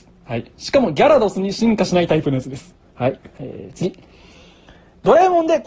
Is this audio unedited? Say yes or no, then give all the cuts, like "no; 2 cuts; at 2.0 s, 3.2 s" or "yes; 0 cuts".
no; 1 cut; at 3.2 s